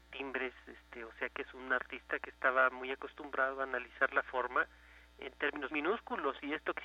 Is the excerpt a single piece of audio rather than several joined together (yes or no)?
no